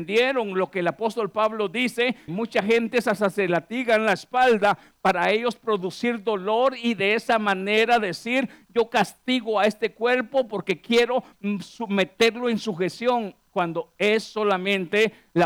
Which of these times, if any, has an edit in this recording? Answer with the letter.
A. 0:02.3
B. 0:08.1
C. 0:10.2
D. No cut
A